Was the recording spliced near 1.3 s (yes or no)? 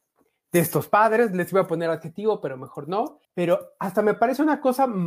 no